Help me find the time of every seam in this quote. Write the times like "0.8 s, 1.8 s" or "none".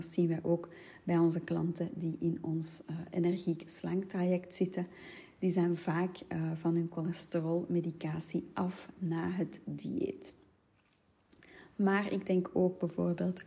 none